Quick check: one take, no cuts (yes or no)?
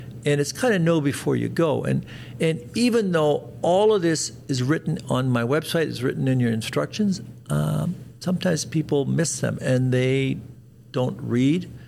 yes